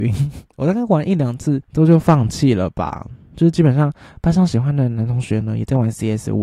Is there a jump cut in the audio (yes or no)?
yes